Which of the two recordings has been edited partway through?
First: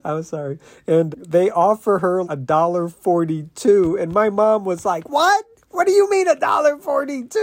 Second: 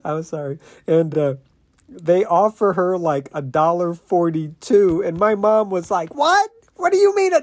first; 2 cuts; at 1.1 s, 2.2 s

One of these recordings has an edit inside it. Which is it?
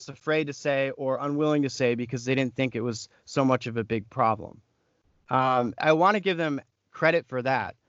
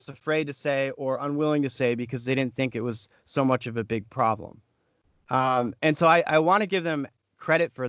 first; 1 cut; at 5.8 s

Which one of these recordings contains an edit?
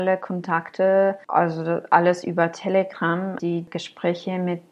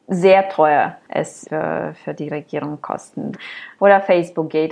second; 2 cuts; at 1.4 s, 3.3 s

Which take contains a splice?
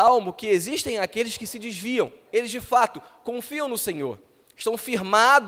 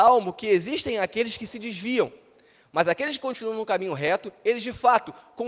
first; 1 cut; at 2.3 s

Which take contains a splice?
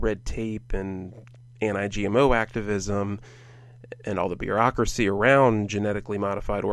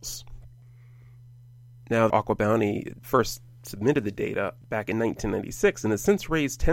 second; 2 cuts; at 2.1 s, 4.6 s

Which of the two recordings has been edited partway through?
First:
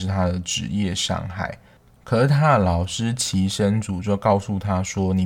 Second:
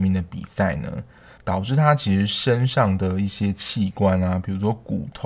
second; 1 cut; at 1.4 s

